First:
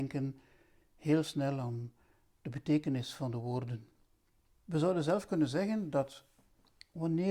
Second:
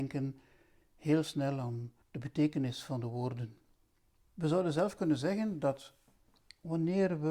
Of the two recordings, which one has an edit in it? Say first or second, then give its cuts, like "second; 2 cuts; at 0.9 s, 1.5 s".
second; 1 cut; at 2.0 s